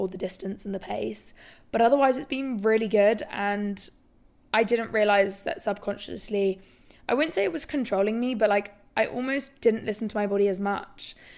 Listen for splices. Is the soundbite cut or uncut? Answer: uncut